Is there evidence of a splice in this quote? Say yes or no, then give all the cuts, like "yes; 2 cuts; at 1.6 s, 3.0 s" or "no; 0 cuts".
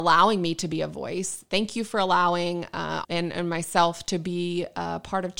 yes; 1 cut; at 3.0 s